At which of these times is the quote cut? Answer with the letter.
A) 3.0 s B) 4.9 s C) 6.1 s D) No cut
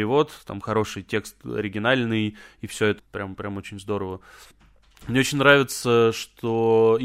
A